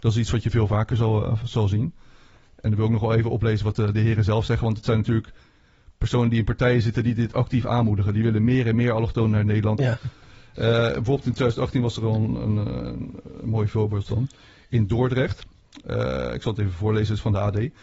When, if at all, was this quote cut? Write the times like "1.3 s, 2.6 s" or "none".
9.8 s